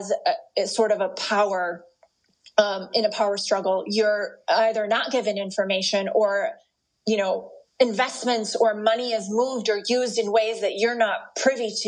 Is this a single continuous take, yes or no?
no